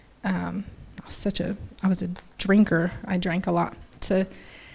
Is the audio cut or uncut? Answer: uncut